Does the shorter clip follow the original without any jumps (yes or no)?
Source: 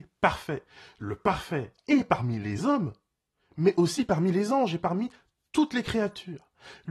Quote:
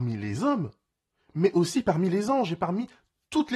yes